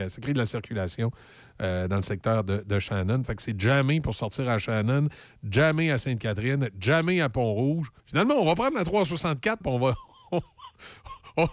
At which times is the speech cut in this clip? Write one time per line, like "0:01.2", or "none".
0:08.0
0:09.6